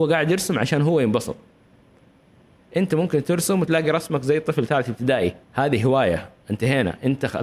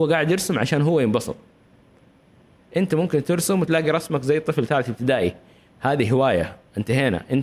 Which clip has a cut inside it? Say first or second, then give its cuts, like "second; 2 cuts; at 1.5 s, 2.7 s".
first; 1 cut; at 5.4 s